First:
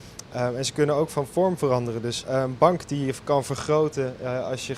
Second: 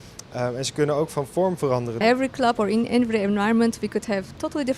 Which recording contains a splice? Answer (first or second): second